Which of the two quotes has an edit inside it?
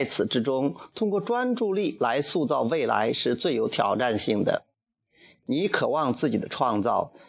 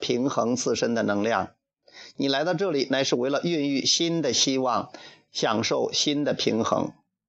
first; 1 cut; at 5.3 s

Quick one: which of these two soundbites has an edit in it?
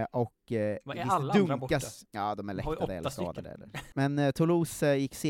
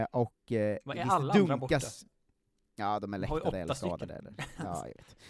first; 2 cuts; at 2.1 s, 3.9 s

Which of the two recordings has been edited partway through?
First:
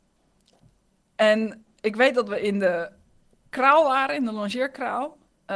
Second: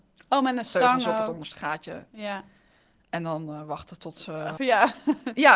second; 1 cut; at 4.6 s

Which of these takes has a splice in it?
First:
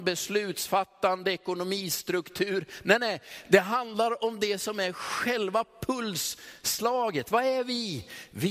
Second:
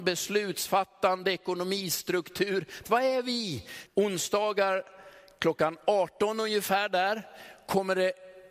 second; 2 cuts; at 2.8 s, 3.9 s

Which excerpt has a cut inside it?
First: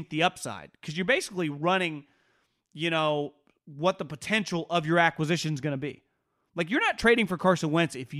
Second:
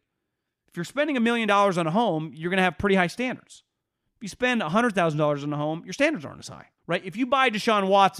second; 1 cut; at 6.8 s

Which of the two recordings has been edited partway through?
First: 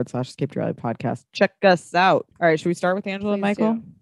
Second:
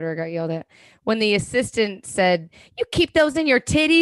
first; 1 cut; at 2.3 s

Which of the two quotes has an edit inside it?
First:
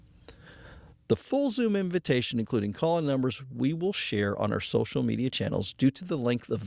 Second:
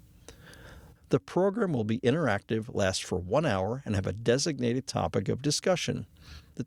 second; 1 cut; at 1.0 s

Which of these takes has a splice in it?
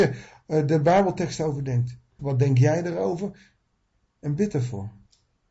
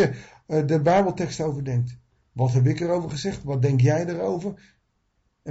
first; 1 cut; at 2.2 s

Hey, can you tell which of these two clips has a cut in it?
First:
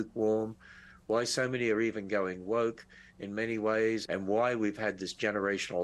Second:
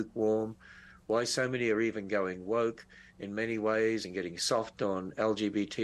first; 1 cut; at 4.0 s

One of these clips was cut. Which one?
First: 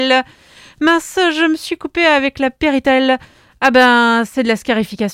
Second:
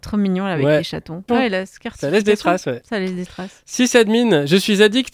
second; 1 cut; at 1.3 s

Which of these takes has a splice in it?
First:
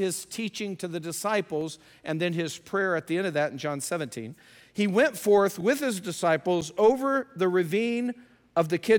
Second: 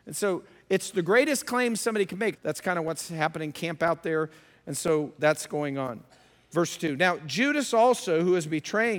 second; 1 cut; at 2.3 s

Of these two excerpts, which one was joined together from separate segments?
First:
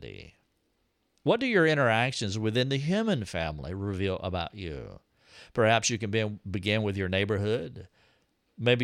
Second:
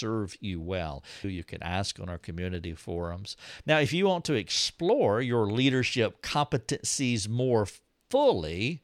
second; 2 cuts; at 1.2 s, 3.6 s

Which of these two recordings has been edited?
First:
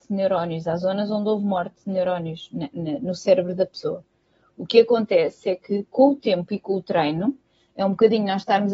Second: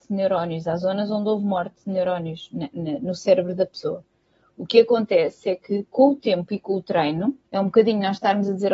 second; 1 cut; at 7.5 s

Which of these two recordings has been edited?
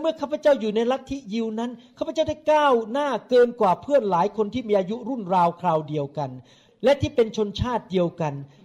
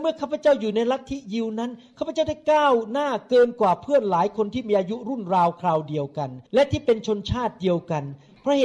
second; 1 cut; at 6.5 s

